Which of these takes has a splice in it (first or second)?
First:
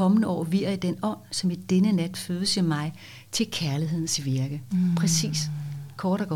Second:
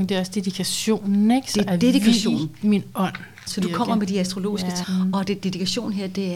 second